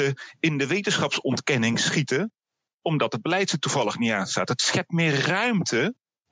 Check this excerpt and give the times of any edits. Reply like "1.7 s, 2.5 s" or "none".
none